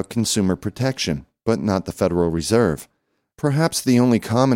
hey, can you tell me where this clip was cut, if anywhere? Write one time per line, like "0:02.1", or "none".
0:03.3